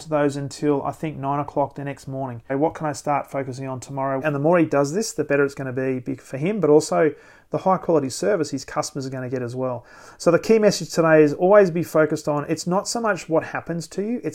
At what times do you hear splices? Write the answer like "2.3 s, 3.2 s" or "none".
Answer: 2.5 s, 4.2 s

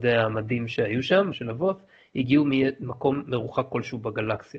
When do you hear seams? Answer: 1.3 s

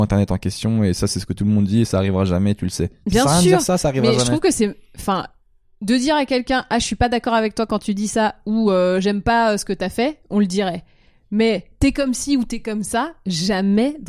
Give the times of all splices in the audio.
none

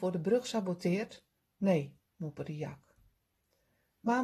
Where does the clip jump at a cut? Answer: 2.1 s

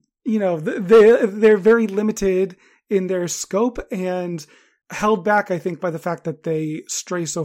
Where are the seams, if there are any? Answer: none

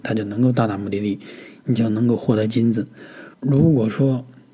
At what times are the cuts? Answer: 3.3 s

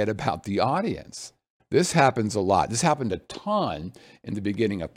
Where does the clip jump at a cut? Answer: 1.6 s

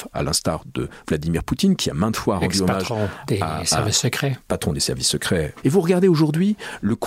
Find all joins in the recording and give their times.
5.6 s

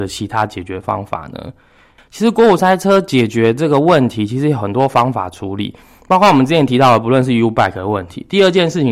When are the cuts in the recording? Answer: none

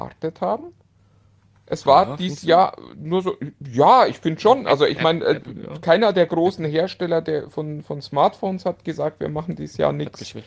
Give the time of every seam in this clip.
none

